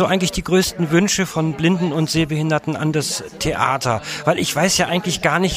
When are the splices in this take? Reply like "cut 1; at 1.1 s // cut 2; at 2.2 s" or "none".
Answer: none